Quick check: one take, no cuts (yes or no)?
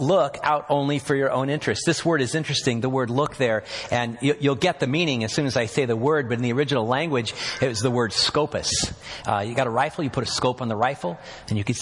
no